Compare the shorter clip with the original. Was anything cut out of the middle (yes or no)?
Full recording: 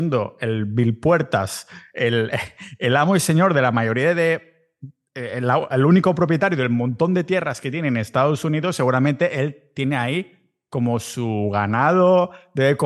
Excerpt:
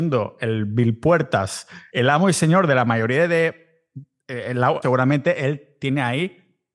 yes